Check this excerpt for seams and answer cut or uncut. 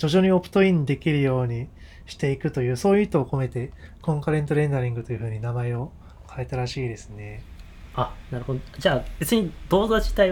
uncut